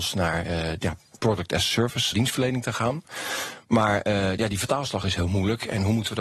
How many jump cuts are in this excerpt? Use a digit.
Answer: 1